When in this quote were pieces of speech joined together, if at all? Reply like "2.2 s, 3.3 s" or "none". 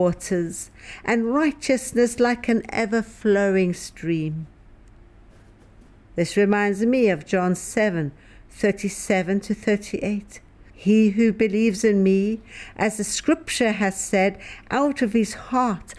10.7 s